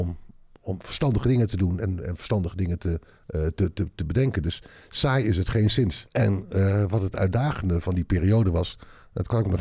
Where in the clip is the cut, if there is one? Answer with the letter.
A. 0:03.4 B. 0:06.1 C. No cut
B